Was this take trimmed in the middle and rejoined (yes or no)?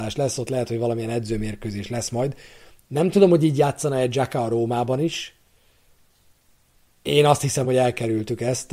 yes